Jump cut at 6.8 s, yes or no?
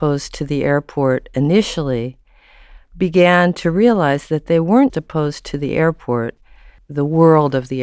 yes